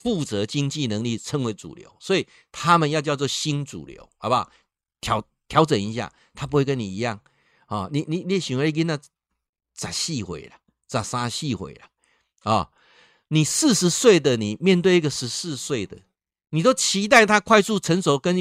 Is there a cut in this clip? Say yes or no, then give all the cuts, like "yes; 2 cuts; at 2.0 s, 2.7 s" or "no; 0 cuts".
no; 0 cuts